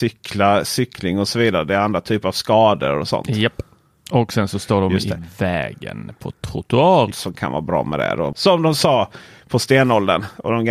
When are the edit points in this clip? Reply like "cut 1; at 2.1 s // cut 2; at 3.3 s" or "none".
cut 1; at 7.1 s // cut 2; at 8.3 s